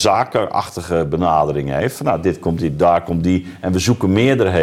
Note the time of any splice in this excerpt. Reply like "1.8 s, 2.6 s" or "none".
none